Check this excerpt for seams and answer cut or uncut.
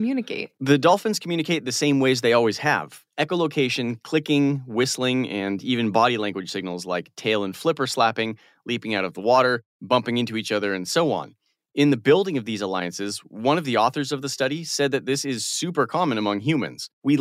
uncut